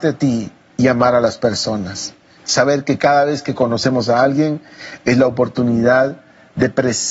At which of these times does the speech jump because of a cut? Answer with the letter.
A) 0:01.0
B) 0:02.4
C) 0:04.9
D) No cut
B